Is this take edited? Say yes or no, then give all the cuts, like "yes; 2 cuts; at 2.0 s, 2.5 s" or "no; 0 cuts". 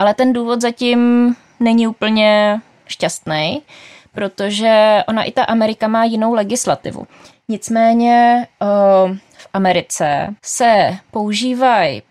yes; 2 cuts; at 7.3 s, 10.4 s